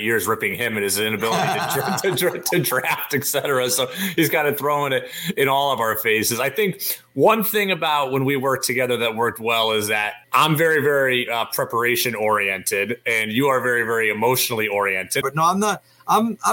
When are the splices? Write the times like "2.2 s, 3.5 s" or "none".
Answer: 10.2 s, 15.2 s